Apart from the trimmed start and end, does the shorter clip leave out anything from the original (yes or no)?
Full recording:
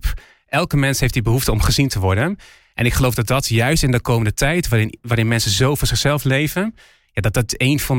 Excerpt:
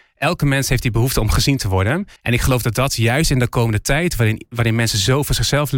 yes